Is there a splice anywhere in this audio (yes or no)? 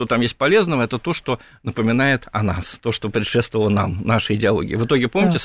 no